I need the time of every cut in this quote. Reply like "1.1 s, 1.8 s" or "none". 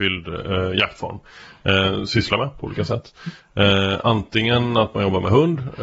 2.1 s